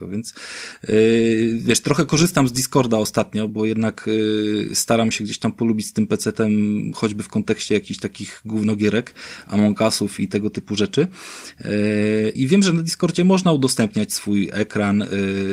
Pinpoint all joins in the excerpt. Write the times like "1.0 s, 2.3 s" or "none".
3.5 s, 12.4 s